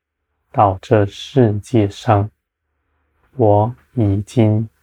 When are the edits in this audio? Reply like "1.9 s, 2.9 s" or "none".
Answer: none

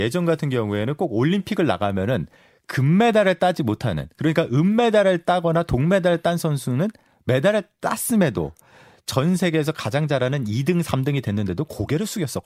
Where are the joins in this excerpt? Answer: none

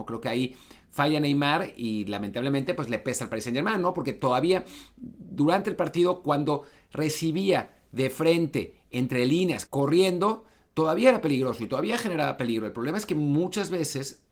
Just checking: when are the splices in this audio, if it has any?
9.7 s

